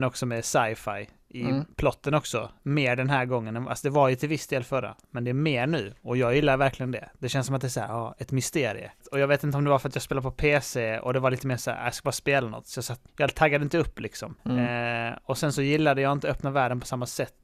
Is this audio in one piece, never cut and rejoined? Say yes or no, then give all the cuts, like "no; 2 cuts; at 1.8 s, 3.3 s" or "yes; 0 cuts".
no; 3 cuts; at 9.0 s, 13.1 s, 14.4 s